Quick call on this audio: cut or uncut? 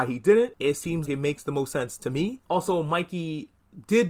cut